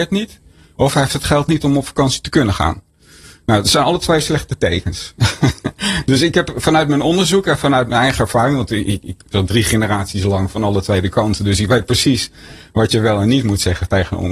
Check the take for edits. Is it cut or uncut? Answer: cut